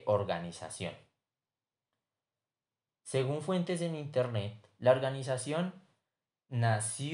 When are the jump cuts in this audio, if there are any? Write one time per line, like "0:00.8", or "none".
0:02.9